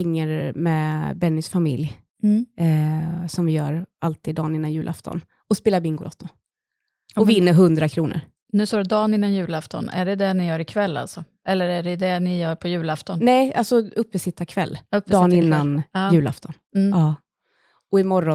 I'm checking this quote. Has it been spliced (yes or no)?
no